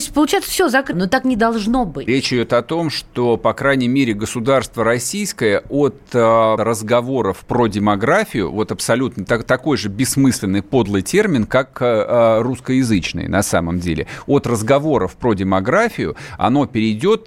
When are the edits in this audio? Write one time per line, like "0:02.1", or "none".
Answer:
0:00.9
0:02.1
0:06.6